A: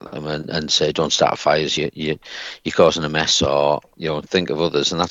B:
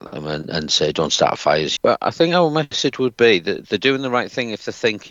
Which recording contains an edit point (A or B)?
B